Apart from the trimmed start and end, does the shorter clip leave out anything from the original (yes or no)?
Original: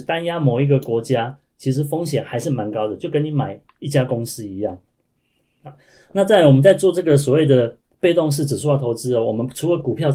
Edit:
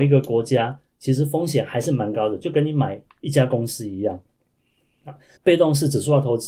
yes